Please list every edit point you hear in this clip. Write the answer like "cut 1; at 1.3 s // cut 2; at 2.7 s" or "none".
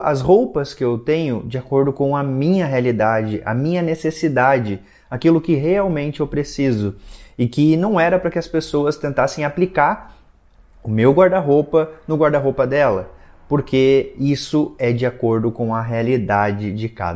none